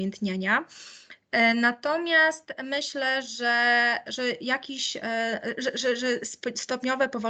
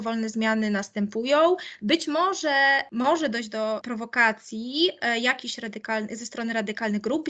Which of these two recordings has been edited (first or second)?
second